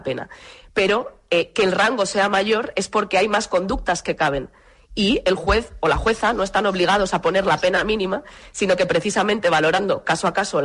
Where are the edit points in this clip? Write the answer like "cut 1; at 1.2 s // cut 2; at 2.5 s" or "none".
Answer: none

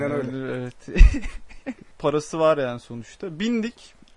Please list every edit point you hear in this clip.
cut 1; at 1.9 s

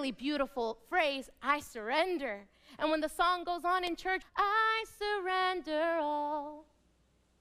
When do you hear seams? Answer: cut 1; at 2.8 s // cut 2; at 4.2 s

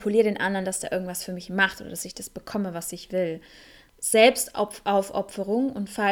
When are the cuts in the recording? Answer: none

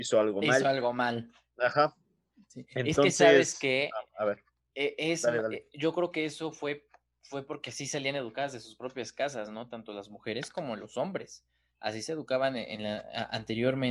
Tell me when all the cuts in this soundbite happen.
none

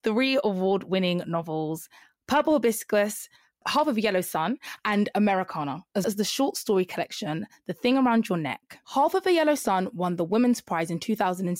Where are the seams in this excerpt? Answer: cut 1; at 6.0 s // cut 2; at 8.8 s

